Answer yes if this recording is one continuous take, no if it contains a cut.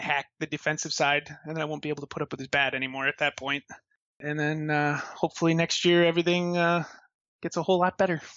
yes